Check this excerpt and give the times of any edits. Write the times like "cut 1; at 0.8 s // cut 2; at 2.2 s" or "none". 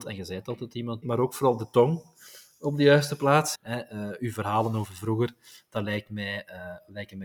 cut 1; at 1.0 s // cut 2; at 3.6 s